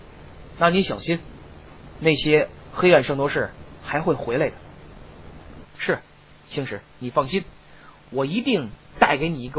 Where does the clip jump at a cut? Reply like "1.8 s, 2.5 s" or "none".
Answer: 5.6 s